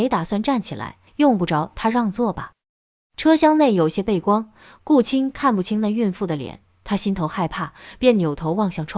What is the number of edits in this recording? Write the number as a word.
one